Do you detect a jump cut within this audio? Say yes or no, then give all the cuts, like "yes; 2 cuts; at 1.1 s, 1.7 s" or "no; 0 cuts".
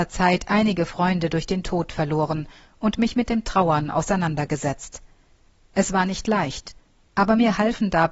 no; 0 cuts